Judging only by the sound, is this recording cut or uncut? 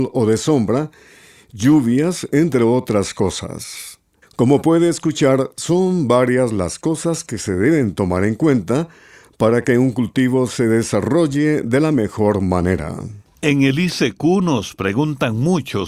cut